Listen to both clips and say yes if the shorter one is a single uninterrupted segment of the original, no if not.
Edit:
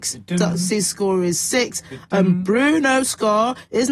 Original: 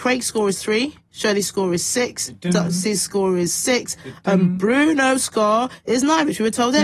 yes